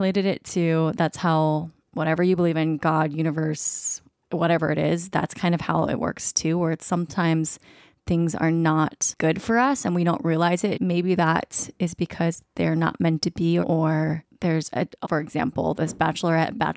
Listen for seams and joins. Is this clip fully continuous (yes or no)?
no